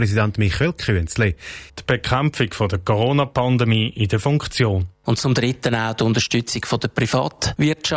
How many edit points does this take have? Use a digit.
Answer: 2